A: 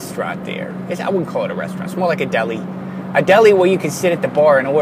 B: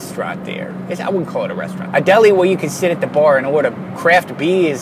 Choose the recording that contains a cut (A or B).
B